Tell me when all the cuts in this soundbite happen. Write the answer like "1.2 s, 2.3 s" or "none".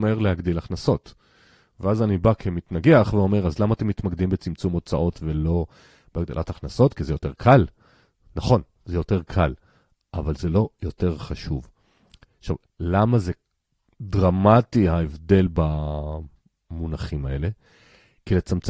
none